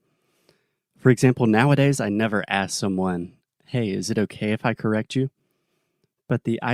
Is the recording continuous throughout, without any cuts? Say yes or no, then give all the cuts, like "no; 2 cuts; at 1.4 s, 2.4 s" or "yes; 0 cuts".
yes; 0 cuts